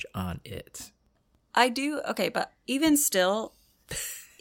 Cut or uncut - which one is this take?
uncut